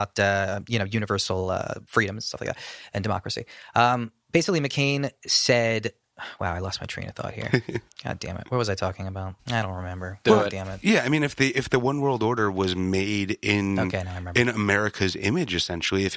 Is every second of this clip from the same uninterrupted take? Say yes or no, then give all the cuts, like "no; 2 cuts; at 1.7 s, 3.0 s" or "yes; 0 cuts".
no; 1 cut; at 9.4 s